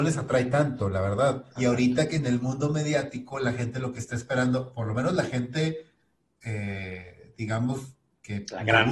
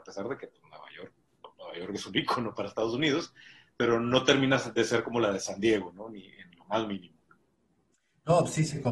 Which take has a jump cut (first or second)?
first